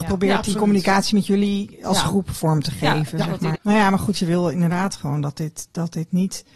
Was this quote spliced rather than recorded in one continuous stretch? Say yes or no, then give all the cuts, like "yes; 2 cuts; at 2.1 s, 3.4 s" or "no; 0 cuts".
yes; 1 cut; at 3.5 s